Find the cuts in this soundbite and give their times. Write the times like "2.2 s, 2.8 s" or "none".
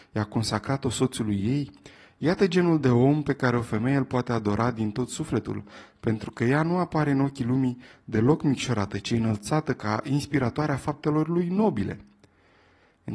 none